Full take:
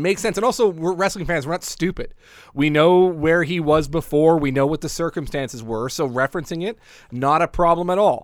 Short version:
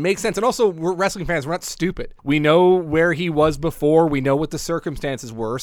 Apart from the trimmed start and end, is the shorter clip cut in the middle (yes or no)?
yes